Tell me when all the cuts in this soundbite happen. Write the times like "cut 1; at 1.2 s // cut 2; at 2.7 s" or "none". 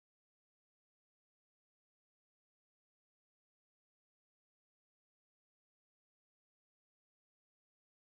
none

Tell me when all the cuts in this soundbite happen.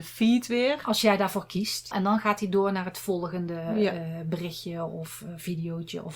cut 1; at 1.9 s

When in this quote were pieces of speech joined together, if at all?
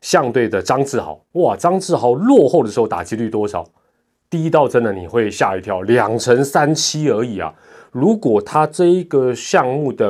none

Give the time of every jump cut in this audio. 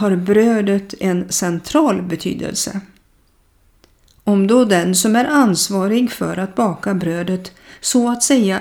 none

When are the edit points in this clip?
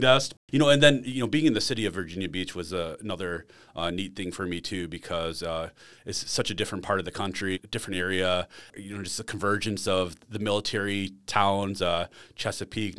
none

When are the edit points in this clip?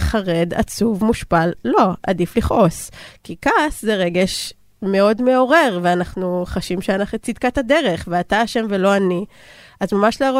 none

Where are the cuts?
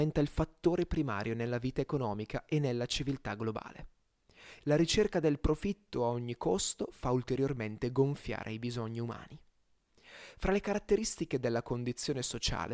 cut 1; at 4.6 s

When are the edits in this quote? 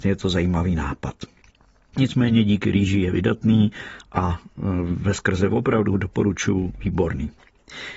none

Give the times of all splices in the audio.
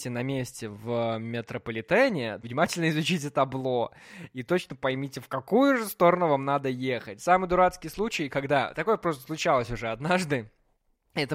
cut 1; at 2.4 s

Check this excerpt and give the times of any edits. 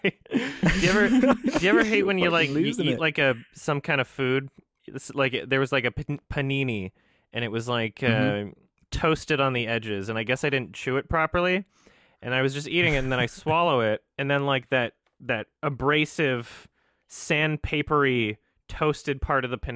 none

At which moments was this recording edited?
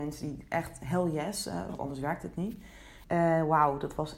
cut 1; at 1.7 s // cut 2; at 3.0 s

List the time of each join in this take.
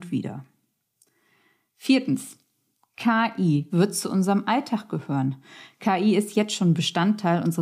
cut 1; at 3.7 s

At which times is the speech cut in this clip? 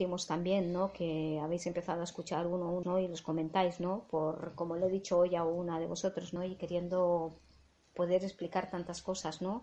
cut 1; at 2.8 s // cut 2; at 6.4 s

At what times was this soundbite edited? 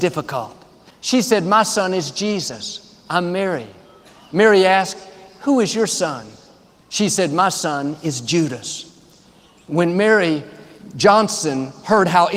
cut 1; at 0.9 s

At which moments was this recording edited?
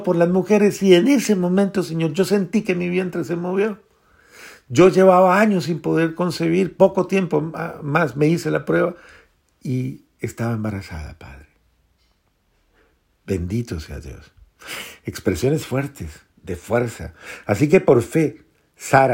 cut 1; at 16.3 s

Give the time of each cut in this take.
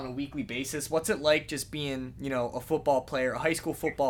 none

